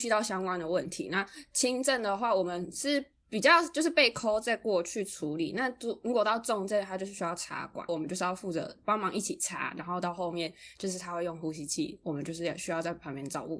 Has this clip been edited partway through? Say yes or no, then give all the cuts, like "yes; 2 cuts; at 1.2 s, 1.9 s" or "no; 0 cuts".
yes; 1 cut; at 7.9 s